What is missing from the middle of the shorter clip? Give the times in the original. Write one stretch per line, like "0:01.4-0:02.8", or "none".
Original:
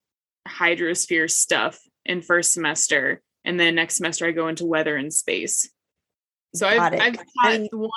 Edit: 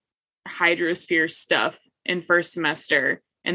none